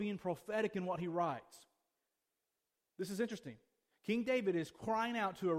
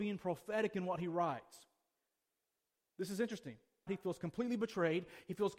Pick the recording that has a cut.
second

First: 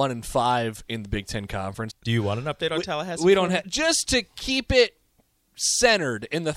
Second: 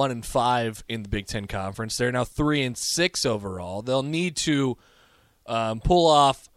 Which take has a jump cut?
first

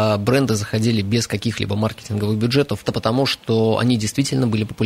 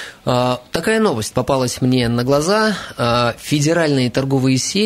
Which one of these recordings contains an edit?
first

